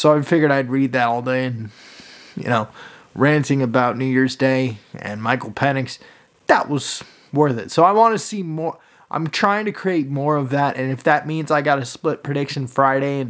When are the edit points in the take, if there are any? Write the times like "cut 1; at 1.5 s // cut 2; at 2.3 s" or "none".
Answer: none